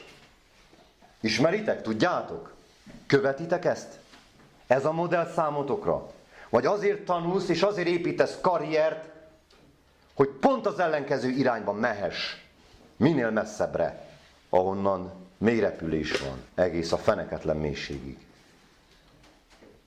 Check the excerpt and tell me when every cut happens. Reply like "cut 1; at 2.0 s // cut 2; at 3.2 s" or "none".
cut 1; at 14.3 s // cut 2; at 16.5 s